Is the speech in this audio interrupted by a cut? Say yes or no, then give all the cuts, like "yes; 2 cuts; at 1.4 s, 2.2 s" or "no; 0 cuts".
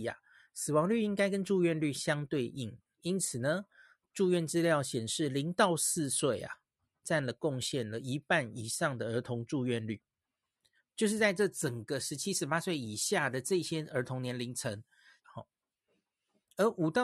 yes; 1 cut; at 15.2 s